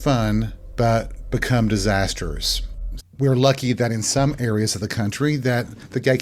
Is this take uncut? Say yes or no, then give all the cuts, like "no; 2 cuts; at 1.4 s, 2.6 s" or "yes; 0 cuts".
no; 1 cut; at 3.0 s